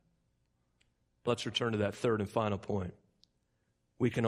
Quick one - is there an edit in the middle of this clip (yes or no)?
yes